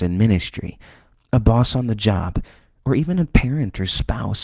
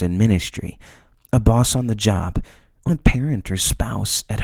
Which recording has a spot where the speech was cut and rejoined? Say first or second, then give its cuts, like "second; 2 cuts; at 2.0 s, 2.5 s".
second; 1 cut; at 2.9 s